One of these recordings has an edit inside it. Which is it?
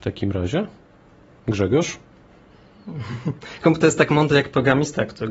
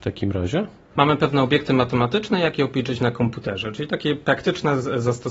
second; 1 cut; at 0.9 s

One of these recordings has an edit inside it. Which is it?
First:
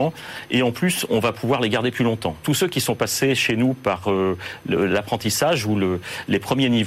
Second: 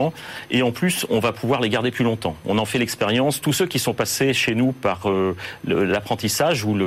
first; 1 cut; at 2.4 s

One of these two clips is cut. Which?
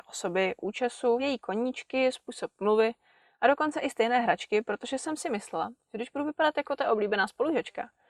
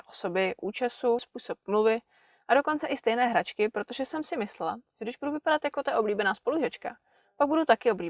second; 1 cut; at 1.2 s

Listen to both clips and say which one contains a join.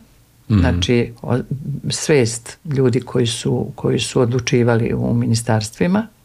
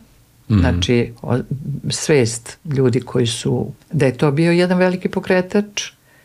second; 1 cut; at 3.8 s

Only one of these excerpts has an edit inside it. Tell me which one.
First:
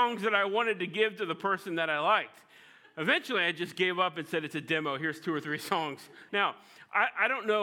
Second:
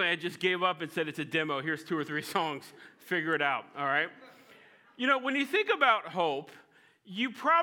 first; 1 cut; at 6.3 s

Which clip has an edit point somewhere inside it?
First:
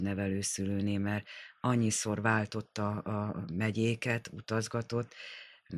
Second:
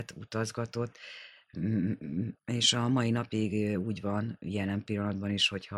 second; 1 cut; at 2.4 s

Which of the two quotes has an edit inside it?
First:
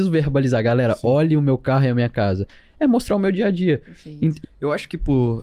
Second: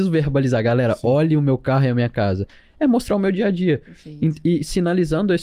first; 1 cut; at 4.4 s

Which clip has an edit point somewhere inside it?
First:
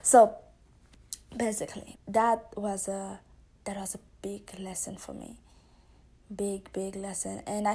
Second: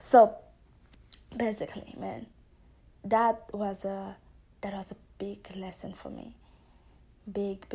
first; 1 cut; at 1.9 s

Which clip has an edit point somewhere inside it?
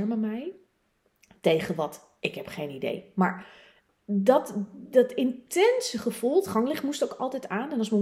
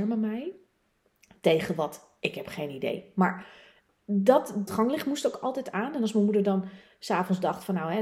second; 1 cut; at 4.7 s

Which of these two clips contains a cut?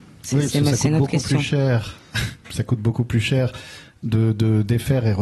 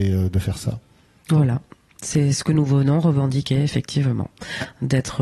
first; 1 cut; at 2.4 s

